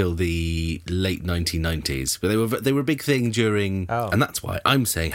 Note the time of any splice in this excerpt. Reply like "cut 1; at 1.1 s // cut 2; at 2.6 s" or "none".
cut 1; at 4.1 s